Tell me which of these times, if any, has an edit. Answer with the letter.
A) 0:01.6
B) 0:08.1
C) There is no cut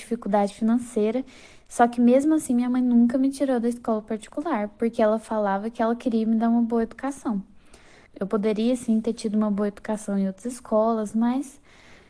B